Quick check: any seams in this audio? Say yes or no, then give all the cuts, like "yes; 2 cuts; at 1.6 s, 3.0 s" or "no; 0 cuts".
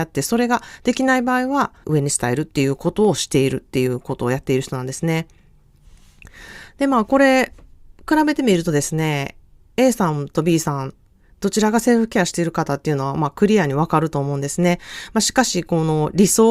yes; 1 cut; at 1.8 s